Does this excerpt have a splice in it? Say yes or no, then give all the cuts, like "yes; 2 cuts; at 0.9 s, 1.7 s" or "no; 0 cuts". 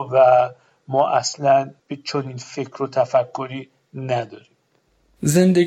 yes; 1 cut; at 1.8 s